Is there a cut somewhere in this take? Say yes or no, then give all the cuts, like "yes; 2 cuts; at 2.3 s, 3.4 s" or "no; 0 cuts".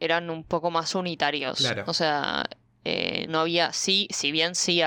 yes; 1 cut; at 3.3 s